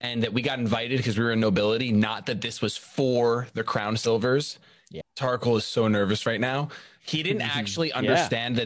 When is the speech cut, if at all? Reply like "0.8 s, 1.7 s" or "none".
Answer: 5.0 s